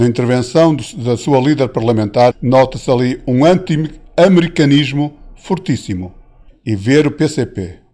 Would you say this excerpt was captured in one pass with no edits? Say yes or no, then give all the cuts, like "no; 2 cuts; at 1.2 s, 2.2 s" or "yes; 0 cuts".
no; 2 cuts; at 2.3 s, 6.5 s